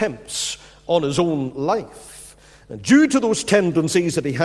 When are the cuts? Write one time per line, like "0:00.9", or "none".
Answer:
none